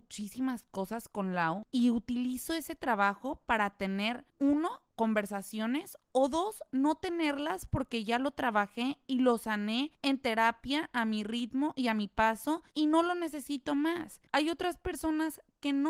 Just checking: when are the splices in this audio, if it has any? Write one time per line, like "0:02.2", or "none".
0:01.6
0:14.3